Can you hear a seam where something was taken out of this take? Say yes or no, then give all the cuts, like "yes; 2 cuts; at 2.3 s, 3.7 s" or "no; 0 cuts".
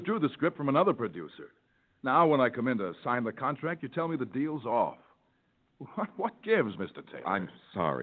no; 0 cuts